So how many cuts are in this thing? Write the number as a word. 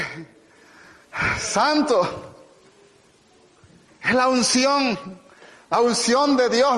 zero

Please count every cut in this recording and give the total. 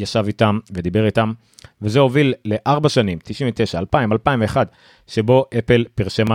one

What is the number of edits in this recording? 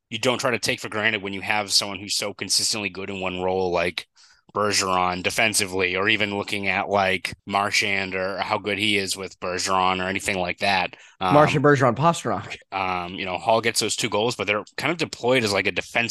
two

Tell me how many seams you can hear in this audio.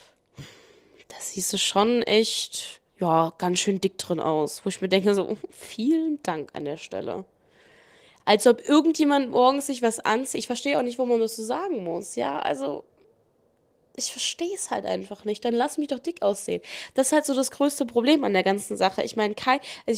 one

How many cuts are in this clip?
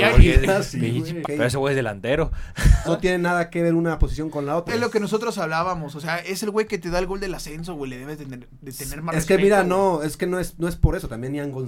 three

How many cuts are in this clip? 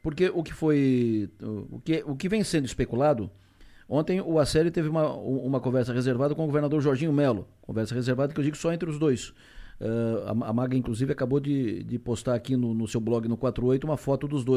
zero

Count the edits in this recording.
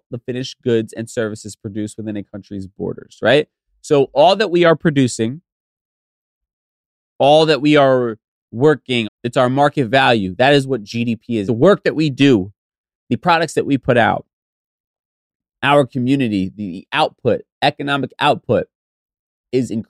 two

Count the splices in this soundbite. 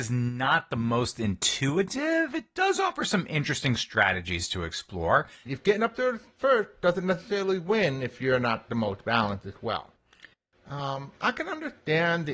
two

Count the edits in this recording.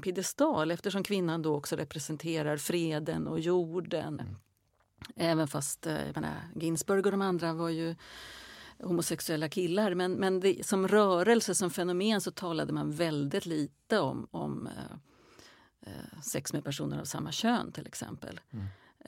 one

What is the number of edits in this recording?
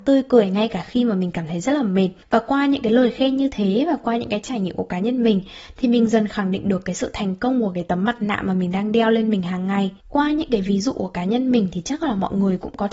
one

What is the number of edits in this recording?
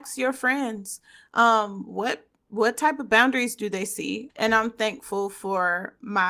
one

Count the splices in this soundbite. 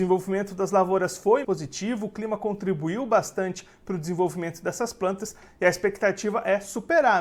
one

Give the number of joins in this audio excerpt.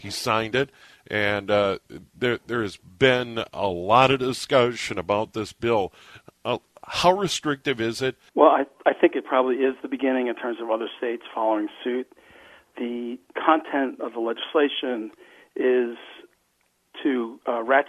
one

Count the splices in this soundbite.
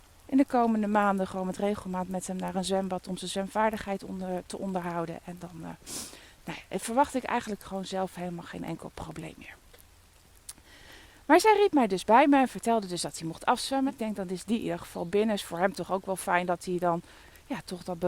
one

